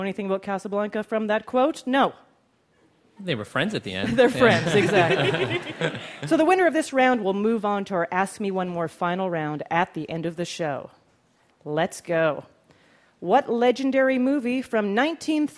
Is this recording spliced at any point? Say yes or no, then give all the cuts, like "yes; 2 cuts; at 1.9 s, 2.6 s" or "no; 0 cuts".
no; 0 cuts